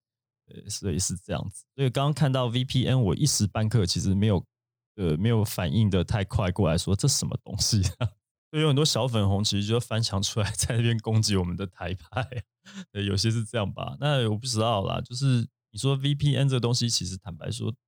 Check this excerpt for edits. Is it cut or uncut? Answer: cut